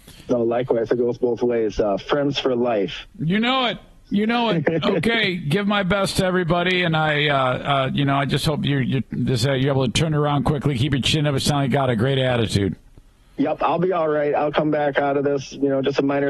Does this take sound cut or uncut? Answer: uncut